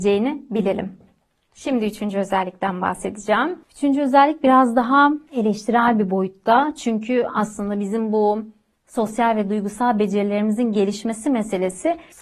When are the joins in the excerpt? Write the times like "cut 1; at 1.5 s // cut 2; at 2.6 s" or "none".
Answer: none